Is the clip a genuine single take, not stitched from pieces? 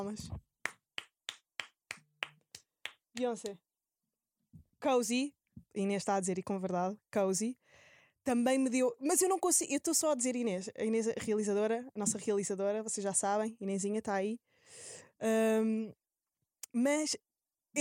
yes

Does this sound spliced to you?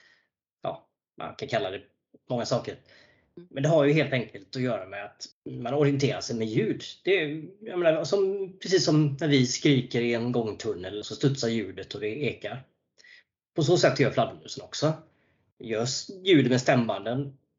yes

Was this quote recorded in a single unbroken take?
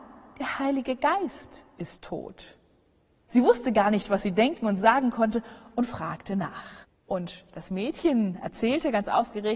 no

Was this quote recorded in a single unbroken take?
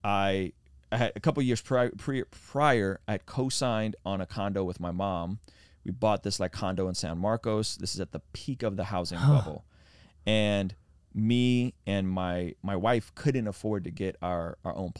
yes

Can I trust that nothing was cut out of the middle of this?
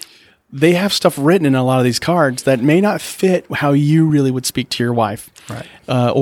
yes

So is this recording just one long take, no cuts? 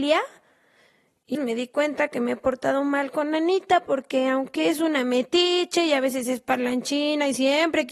no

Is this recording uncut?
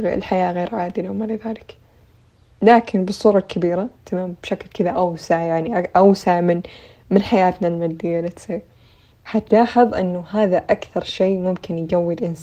yes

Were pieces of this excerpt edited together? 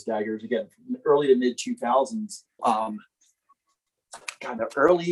yes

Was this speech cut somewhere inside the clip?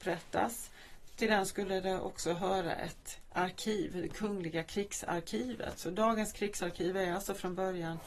no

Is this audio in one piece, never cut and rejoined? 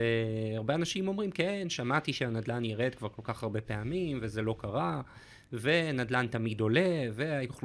yes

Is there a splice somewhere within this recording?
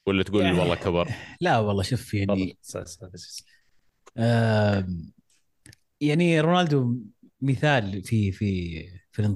no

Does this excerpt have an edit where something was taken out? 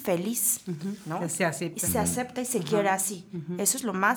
no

